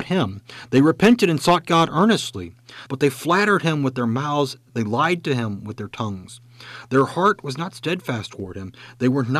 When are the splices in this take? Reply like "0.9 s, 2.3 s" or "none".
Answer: 2.9 s